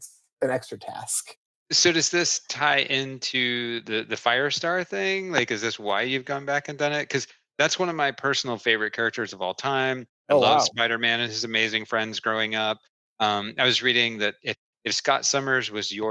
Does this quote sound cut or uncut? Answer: uncut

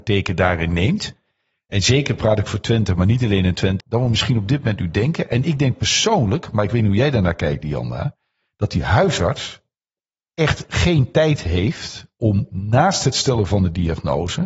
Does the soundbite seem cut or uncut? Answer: cut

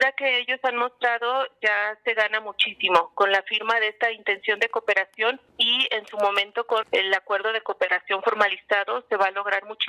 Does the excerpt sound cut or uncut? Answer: cut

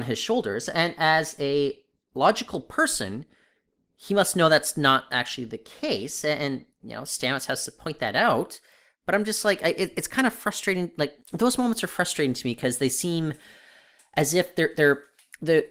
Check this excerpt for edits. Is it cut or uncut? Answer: uncut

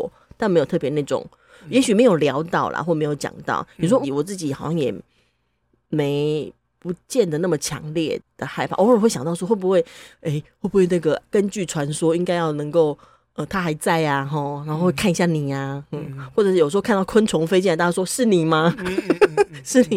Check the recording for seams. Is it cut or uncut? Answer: cut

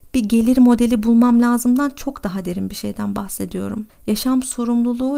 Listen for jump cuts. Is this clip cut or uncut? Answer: cut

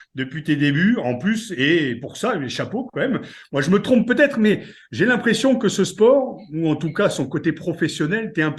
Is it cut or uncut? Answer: uncut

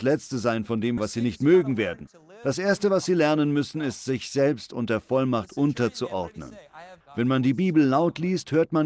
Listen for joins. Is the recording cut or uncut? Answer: cut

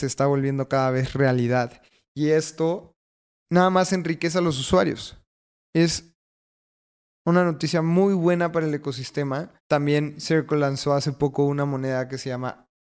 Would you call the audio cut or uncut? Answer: cut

